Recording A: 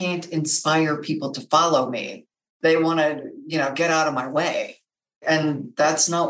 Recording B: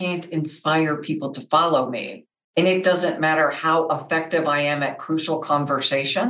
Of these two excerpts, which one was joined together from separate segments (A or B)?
B